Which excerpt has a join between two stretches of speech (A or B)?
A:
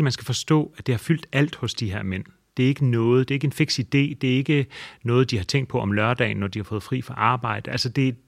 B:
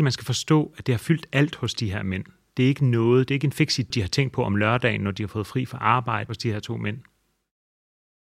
B